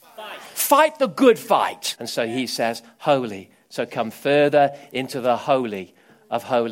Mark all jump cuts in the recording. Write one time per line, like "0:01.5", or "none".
0:02.0